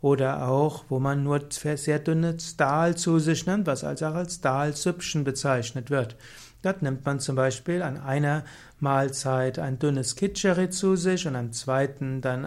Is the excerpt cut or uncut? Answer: uncut